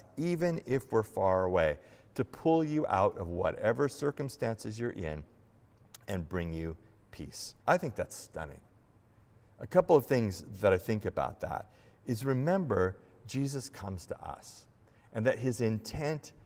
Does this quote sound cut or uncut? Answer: cut